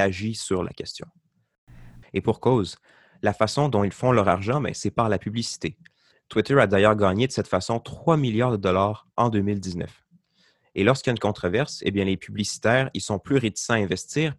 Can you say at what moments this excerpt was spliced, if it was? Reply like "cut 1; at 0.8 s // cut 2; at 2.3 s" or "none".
cut 1; at 2.0 s